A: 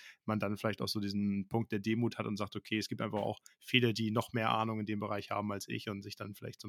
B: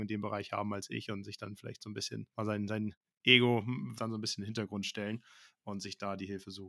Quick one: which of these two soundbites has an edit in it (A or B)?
B